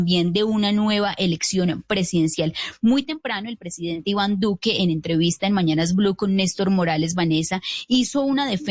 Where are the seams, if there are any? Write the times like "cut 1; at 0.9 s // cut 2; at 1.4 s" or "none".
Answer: none